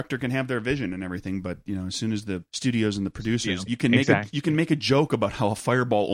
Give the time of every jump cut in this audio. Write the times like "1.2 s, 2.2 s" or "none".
2.5 s, 3.7 s